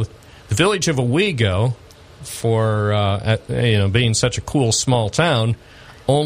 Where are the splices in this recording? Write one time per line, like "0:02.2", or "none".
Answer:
none

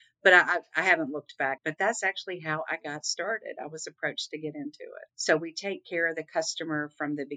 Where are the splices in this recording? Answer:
0:01.6
0:05.1

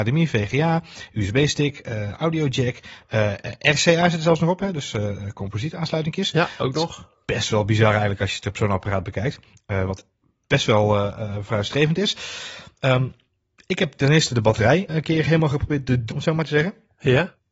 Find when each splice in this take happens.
0:14.9
0:16.1

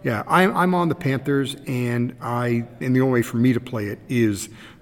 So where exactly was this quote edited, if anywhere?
0:02.8

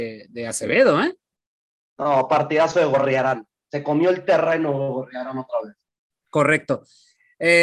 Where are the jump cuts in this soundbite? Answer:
none

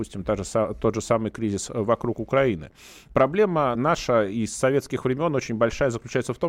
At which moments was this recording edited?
0:03.8

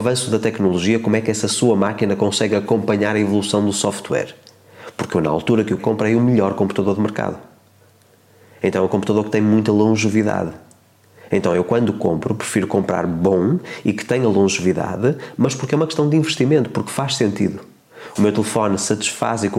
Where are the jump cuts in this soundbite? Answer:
0:05.8
0:18.2

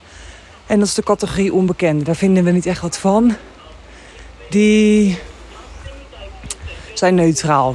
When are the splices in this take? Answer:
none

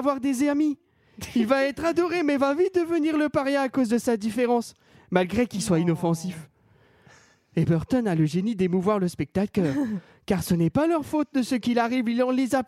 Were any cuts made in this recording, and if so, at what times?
none

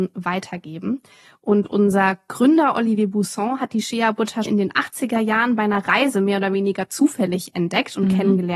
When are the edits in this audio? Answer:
0:04.5

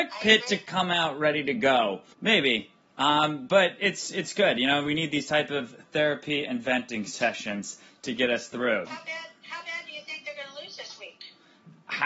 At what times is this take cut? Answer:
0:02.1
0:08.9

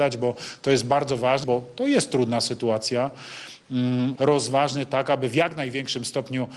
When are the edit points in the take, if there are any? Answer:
0:01.4
0:04.2

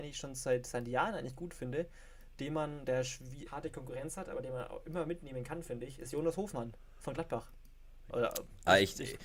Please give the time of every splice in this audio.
0:03.5
0:08.1

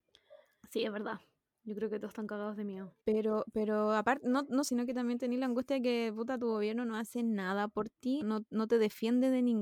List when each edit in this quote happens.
0:03.0
0:04.7
0:08.2

